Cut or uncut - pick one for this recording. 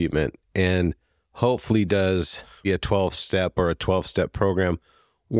cut